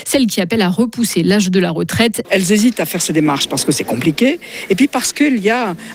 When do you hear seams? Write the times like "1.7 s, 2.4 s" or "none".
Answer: 2.2 s